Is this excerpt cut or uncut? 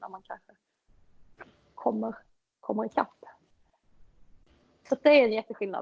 uncut